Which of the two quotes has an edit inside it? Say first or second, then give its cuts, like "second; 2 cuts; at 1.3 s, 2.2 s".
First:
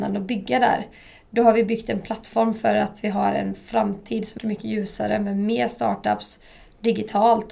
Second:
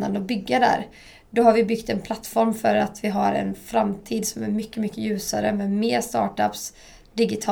first; 1 cut; at 4.4 s